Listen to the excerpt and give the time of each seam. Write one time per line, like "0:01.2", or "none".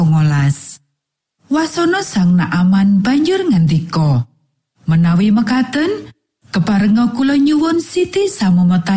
none